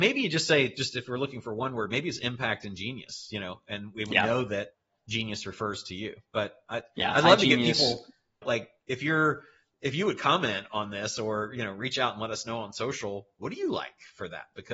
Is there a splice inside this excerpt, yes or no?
no